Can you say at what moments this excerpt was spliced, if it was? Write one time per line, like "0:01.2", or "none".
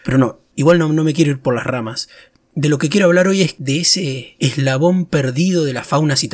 none